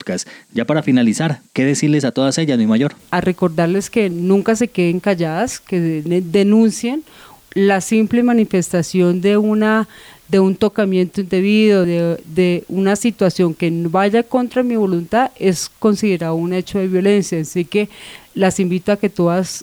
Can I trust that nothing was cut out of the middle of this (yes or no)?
no